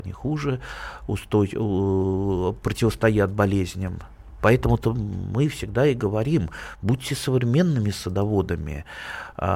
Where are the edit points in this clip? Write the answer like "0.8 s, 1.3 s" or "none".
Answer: none